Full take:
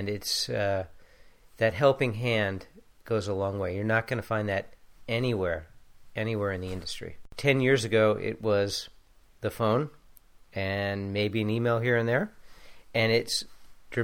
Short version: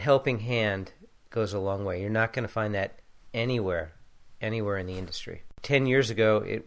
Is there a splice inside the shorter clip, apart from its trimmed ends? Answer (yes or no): no